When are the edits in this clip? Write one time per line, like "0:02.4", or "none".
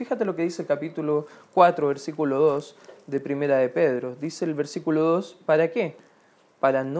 none